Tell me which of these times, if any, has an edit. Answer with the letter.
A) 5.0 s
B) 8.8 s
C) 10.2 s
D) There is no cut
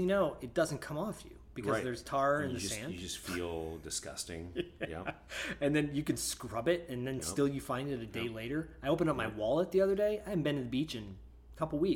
D